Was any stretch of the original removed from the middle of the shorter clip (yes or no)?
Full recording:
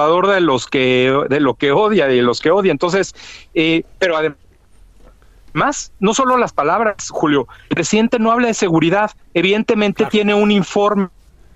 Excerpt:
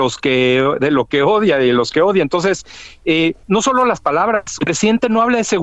yes